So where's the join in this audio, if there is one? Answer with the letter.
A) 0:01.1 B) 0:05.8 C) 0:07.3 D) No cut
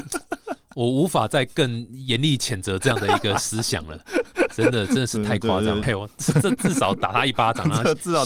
B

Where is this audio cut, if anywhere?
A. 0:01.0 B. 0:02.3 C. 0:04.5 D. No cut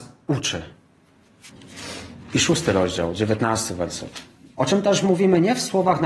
C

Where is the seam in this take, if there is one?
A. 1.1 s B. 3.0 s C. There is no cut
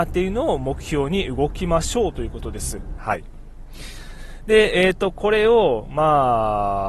B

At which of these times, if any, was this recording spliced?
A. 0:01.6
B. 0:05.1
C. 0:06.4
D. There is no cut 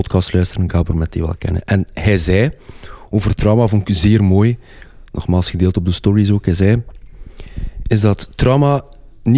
D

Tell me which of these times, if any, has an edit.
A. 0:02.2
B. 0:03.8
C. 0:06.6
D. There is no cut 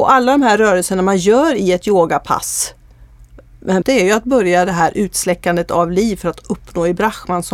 B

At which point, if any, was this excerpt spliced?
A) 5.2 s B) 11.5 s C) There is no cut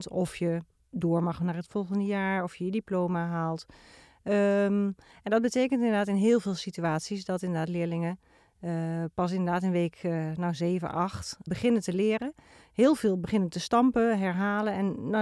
B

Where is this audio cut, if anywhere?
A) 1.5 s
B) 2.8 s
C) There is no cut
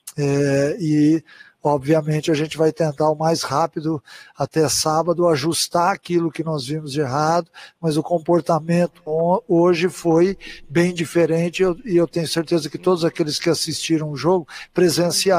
C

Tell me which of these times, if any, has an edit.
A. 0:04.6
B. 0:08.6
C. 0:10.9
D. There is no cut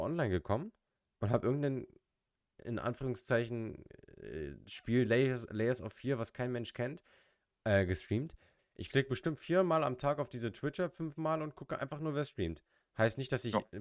B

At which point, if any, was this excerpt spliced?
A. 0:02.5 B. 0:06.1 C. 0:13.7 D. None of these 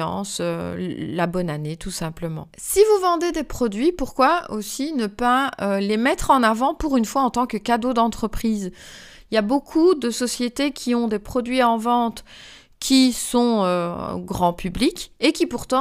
A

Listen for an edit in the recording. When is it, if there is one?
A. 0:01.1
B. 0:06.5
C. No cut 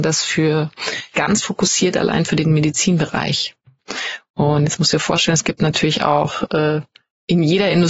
A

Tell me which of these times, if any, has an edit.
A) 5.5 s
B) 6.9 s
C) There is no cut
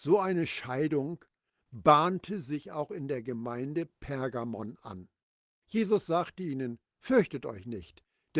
A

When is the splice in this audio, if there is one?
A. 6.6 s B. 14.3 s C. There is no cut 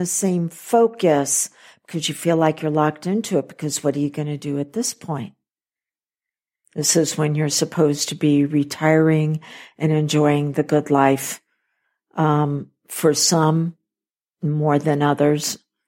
A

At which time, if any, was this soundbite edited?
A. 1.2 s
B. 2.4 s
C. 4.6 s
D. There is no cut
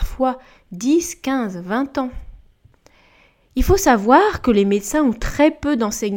D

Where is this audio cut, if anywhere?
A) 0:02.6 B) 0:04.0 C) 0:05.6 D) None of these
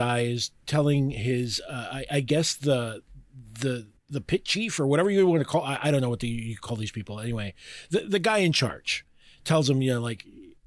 B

